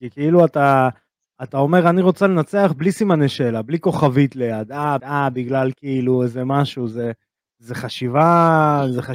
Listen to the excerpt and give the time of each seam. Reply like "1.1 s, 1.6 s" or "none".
5.0 s